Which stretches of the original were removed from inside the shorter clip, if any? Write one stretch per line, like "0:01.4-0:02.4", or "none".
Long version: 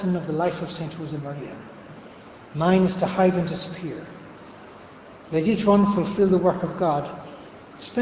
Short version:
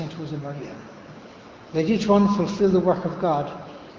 0:02.5-0:05.2